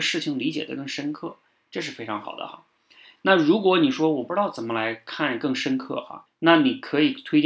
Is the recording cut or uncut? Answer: cut